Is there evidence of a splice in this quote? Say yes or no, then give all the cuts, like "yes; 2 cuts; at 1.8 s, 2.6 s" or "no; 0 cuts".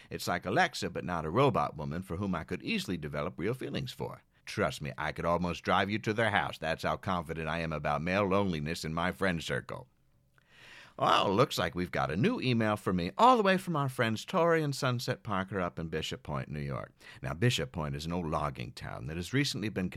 yes; 1 cut; at 4.4 s